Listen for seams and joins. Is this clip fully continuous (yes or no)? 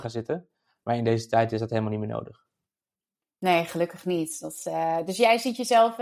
yes